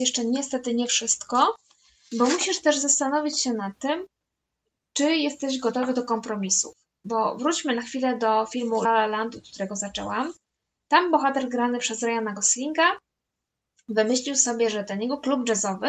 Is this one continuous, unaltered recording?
no; 1 cut; at 8.9 s

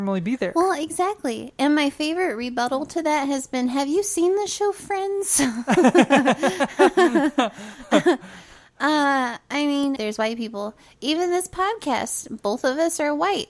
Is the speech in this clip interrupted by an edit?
yes; 1 cut; at 10.0 s

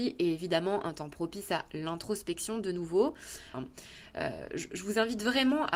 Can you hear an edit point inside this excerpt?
yes; 1 cut; at 3.5 s

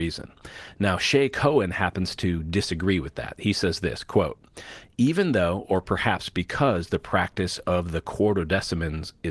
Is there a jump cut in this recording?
no; 0 cuts

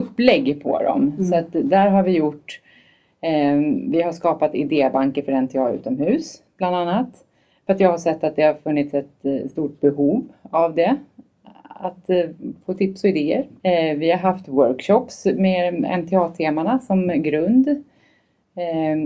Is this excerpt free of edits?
no; 1 cut; at 13.6 s

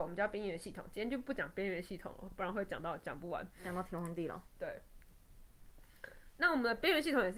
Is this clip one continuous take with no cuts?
yes; 0 cuts

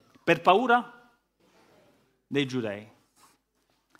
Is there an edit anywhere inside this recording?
no; 0 cuts

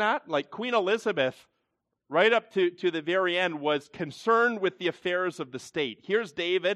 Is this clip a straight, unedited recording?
yes; 0 cuts

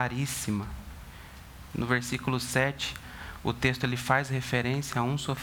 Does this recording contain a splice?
yes; 1 cut; at 1.7 s

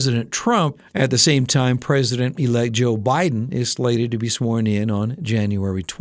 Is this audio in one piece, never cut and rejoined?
yes; 0 cuts

